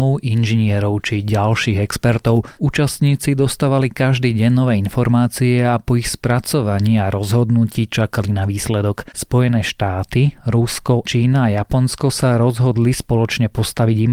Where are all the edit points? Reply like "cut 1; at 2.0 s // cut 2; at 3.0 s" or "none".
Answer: cut 1; at 2.6 s // cut 2; at 9.1 s // cut 3; at 11.0 s